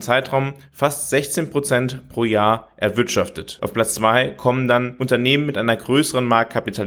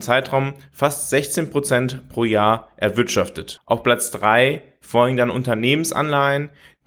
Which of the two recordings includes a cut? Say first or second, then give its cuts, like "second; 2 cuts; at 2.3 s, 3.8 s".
second; 1 cut; at 3.6 s